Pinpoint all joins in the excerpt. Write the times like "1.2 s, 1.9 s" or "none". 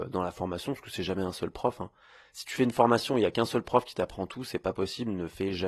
none